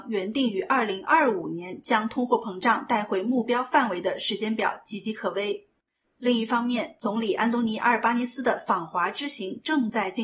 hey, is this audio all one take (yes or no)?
no